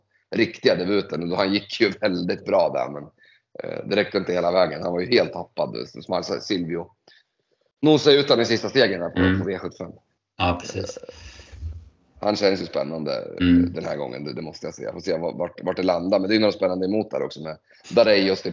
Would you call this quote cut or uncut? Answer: uncut